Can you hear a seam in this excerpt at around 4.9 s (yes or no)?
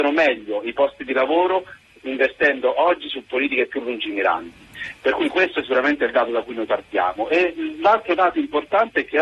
no